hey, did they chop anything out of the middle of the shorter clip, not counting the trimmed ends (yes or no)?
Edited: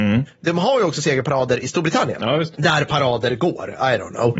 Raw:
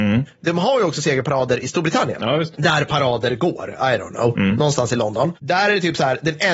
no